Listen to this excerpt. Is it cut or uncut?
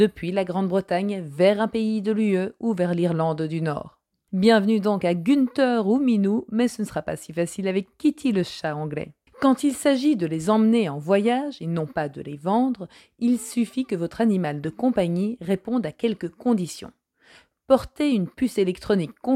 cut